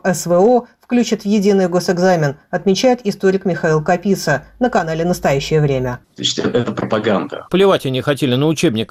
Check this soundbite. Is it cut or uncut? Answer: cut